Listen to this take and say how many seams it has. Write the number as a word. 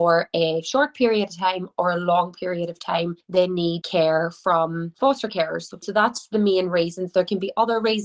zero